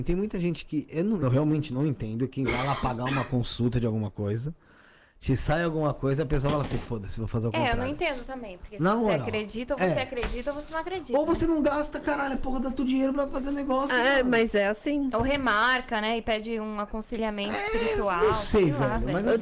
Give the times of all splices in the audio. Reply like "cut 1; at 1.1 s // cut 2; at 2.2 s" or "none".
cut 1; at 1.2 s